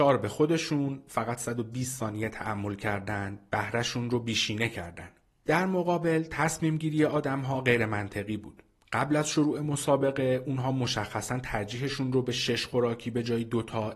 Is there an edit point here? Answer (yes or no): no